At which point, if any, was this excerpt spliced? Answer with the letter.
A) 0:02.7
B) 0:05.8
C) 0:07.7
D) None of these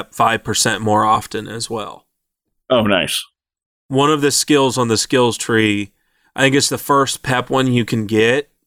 D